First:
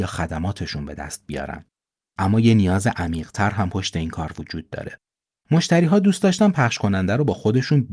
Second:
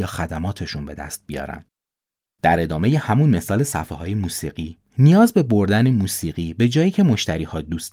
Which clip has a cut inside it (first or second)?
first